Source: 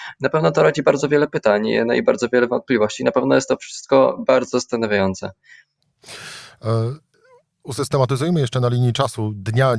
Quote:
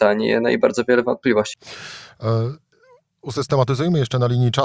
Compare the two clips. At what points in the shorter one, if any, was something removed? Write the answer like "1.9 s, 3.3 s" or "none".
1.5 s